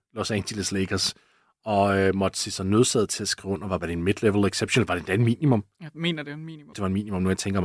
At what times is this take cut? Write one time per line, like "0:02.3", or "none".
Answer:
0:03.8
0:06.7